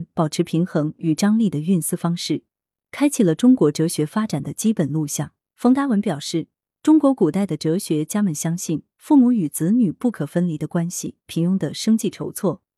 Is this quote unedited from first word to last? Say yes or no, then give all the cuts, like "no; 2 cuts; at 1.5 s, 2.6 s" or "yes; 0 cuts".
no; 2 cuts; at 5.5 s, 11.3 s